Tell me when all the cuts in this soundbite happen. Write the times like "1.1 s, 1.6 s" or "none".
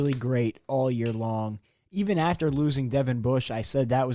none

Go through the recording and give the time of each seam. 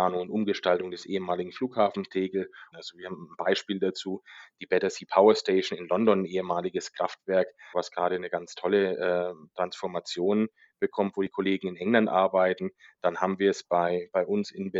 2.7 s, 7.7 s

